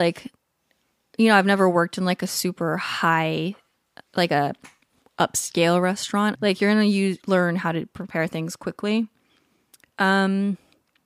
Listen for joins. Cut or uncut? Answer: cut